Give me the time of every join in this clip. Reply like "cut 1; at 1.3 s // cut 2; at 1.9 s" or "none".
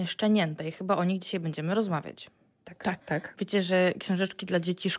cut 1; at 3.0 s